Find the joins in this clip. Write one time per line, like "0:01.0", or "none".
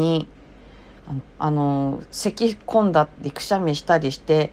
0:01.2

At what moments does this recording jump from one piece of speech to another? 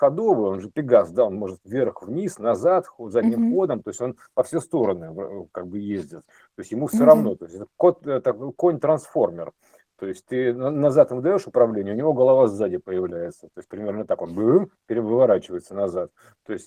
none

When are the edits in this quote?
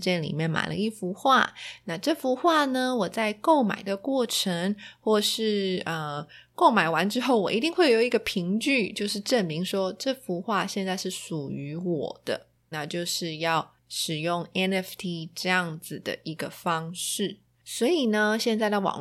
0:12.7

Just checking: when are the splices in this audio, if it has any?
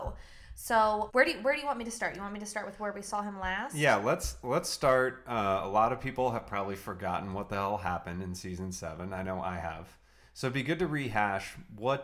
0:01.1

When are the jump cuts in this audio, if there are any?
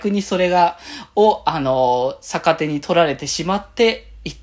none

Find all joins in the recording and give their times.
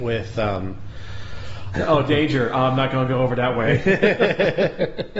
0:01.7

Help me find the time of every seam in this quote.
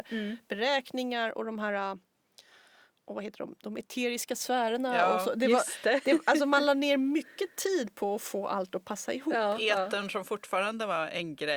none

